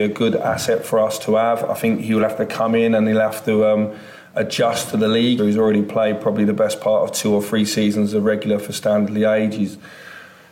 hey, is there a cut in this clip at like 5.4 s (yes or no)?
yes